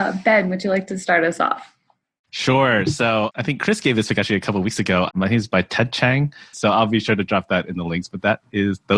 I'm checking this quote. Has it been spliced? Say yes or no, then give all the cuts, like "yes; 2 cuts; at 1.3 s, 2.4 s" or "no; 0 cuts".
yes; 2 cuts; at 5.1 s, 6.5 s